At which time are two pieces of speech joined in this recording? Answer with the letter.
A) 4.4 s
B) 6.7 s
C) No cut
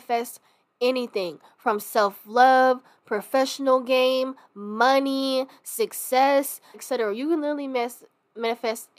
B